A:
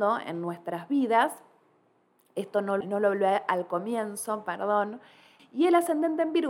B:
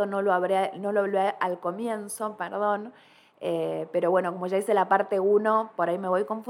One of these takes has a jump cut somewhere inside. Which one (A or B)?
A